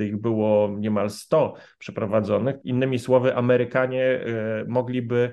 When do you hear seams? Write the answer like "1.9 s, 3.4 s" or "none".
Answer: 2.6 s